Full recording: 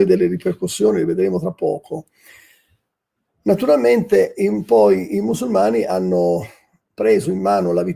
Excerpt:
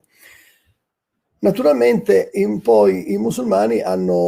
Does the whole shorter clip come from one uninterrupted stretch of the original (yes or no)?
yes